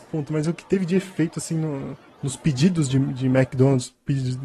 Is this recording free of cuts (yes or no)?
yes